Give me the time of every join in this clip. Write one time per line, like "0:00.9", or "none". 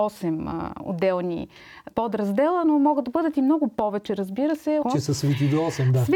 0:01.9
0:04.8